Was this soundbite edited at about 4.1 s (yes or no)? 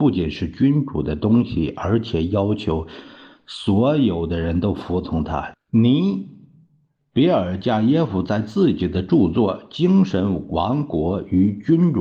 no